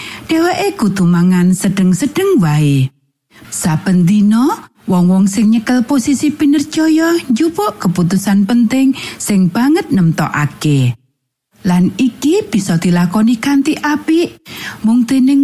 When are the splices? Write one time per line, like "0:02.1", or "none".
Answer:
0:03.4